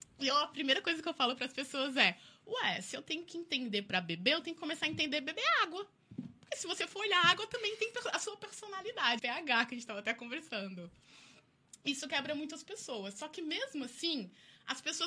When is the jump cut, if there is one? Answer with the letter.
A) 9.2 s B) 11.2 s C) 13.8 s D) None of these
A